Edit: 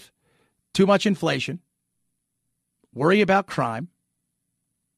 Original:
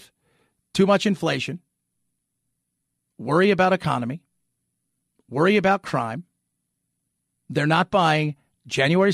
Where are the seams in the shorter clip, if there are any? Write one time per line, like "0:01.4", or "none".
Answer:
0:02.7

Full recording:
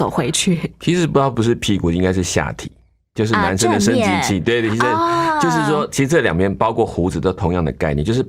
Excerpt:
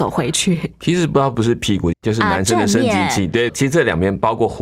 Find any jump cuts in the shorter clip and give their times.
0:01.9
0:03.5

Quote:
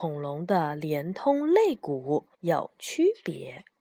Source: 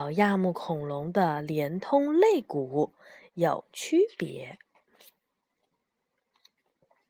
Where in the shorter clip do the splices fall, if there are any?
0:02.3

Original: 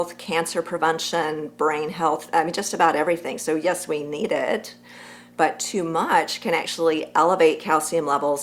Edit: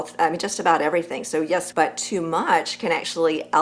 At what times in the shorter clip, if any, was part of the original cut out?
0:01.7

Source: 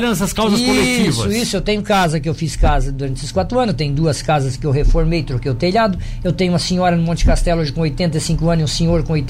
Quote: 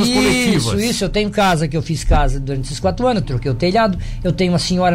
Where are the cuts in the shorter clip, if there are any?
0:03.2

